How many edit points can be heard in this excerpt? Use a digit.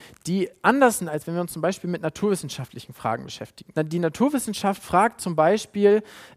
1